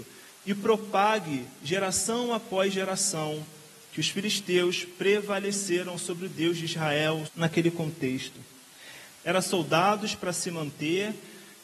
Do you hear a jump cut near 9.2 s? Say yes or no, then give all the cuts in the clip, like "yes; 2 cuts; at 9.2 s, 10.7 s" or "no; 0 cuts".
yes; 2 cuts; at 7.3 s, 9.2 s